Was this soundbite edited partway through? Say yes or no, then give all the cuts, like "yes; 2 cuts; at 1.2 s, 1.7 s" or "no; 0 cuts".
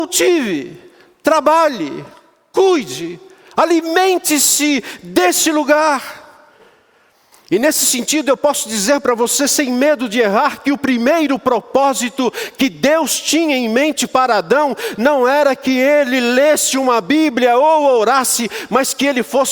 no; 0 cuts